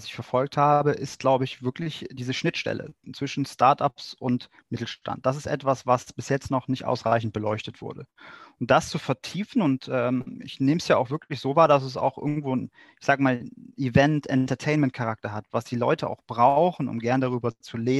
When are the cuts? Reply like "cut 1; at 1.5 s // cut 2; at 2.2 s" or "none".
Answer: none